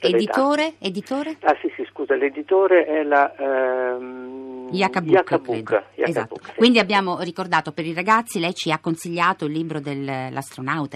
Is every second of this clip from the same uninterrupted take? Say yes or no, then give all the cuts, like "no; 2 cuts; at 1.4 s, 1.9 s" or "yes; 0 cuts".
yes; 0 cuts